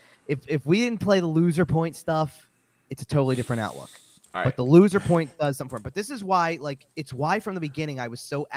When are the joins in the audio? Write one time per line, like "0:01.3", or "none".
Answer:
0:02.8
0:06.9